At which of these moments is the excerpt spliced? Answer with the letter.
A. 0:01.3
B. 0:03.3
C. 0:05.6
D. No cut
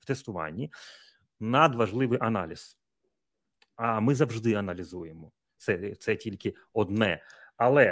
C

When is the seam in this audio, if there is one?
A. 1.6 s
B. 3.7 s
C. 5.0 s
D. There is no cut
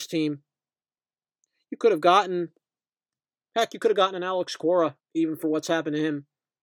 C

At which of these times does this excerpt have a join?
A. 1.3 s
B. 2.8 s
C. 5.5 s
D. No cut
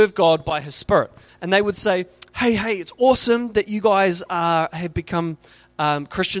A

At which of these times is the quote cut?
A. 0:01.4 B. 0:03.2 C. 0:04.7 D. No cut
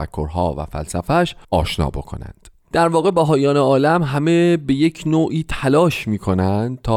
A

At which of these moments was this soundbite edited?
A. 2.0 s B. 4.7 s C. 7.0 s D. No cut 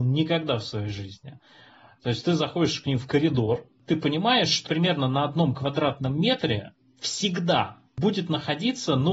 B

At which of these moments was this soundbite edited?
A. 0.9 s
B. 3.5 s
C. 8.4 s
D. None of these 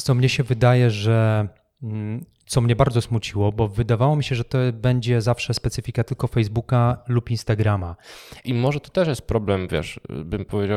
C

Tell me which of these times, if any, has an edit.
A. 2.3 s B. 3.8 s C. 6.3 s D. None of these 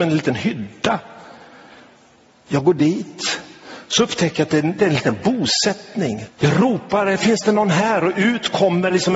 C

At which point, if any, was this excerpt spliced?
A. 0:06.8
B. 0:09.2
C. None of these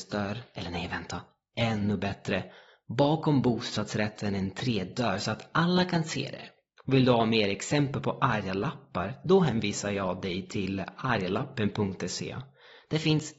A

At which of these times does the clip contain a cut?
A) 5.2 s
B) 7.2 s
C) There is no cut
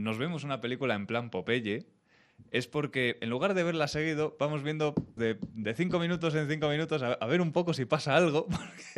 A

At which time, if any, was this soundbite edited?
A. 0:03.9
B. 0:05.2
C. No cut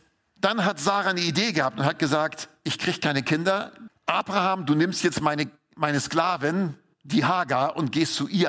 A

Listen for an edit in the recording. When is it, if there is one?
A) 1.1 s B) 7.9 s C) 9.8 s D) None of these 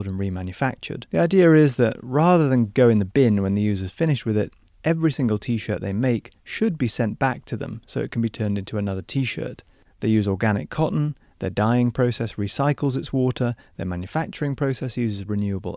C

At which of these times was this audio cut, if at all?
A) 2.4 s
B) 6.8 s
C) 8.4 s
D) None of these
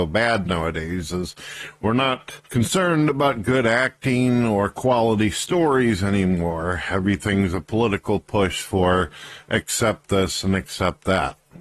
A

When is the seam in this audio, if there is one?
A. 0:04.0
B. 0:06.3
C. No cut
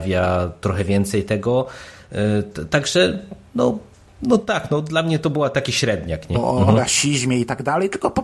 B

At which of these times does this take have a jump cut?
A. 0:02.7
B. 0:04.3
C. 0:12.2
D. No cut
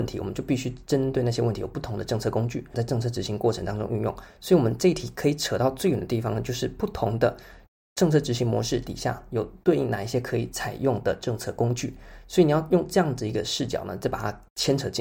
A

